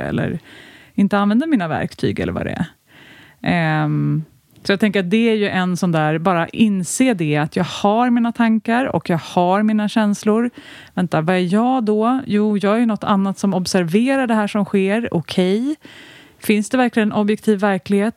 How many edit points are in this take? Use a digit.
0